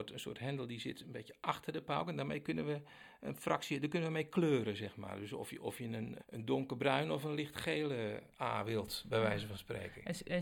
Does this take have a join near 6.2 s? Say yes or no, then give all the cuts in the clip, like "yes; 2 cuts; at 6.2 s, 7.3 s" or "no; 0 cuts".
yes; 1 cut; at 6.2 s